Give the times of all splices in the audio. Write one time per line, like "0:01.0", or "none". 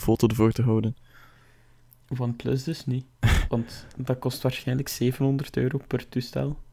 none